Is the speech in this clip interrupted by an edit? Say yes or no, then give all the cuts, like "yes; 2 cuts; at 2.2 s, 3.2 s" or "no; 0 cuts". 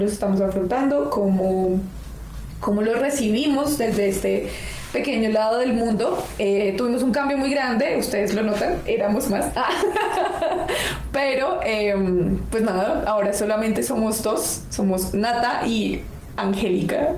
no; 0 cuts